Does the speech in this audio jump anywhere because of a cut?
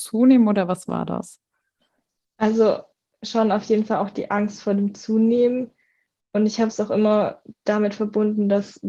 no; 0 cuts

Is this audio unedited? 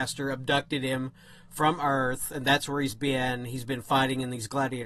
yes; 0 cuts

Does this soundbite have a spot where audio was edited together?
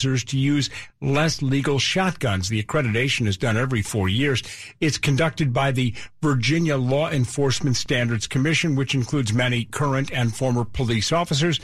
no; 0 cuts

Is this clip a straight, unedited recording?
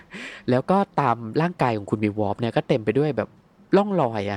yes; 0 cuts

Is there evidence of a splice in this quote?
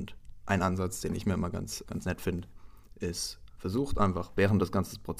yes; 1 cut; at 1.8 s

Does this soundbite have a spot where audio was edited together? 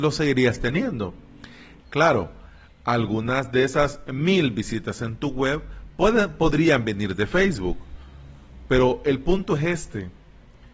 yes; 1 cut; at 1.8 s

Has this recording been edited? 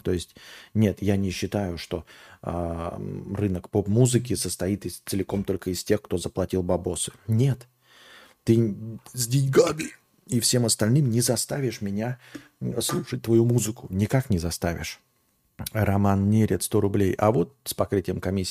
no; 0 cuts

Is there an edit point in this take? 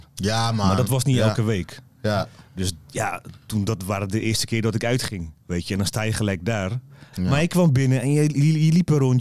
yes; 2 cuts; at 5.4 s, 7.1 s

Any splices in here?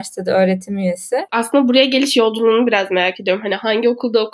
yes; 1 cut; at 1.3 s

